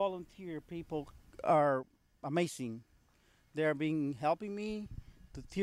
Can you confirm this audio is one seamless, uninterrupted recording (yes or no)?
yes